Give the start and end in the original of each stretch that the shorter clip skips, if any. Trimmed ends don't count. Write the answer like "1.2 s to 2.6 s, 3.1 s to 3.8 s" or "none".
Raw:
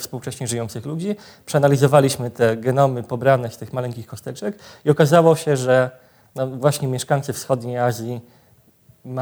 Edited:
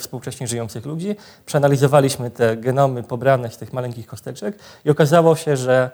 none